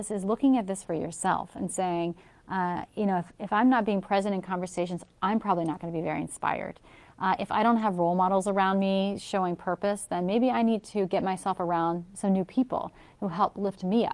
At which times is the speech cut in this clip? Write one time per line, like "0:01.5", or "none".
none